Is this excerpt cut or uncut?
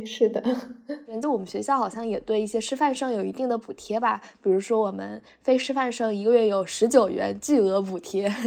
uncut